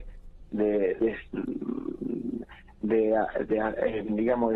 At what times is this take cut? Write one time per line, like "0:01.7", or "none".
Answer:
none